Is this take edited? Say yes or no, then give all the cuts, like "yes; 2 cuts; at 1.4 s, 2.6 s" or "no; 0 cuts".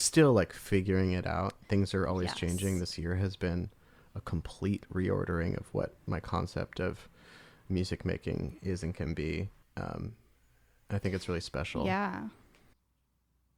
yes; 1 cut; at 9.6 s